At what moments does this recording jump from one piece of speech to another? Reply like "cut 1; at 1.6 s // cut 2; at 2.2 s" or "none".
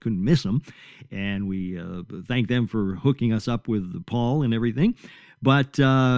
none